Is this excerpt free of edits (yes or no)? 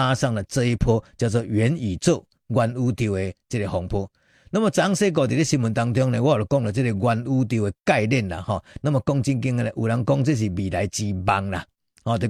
yes